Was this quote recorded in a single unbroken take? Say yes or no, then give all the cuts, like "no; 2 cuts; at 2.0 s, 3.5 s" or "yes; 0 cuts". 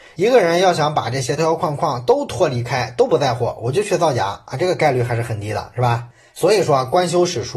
no; 1 cut; at 1.4 s